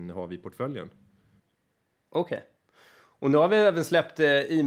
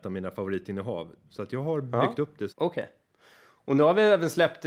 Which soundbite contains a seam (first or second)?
second